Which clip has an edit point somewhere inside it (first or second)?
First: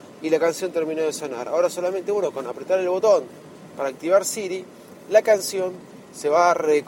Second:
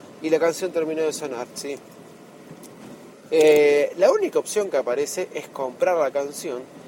second